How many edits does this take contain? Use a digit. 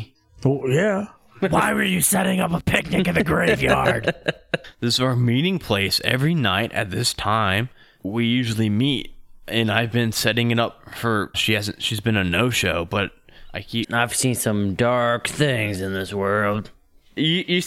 2